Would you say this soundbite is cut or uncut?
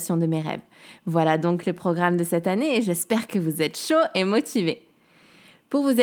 uncut